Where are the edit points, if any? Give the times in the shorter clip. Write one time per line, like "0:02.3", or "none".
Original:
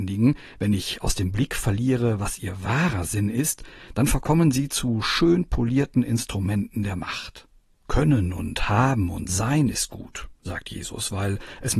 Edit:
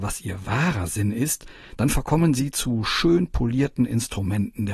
none

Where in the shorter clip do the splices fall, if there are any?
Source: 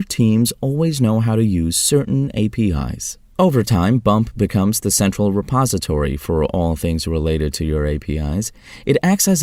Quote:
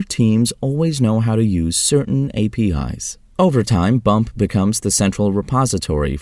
none

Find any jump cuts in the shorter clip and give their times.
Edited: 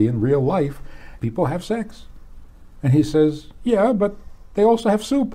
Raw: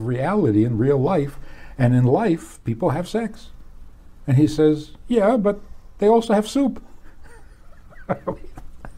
0:01.2

